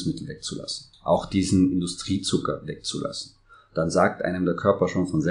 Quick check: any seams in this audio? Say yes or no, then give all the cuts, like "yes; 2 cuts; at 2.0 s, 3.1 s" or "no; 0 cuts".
no; 0 cuts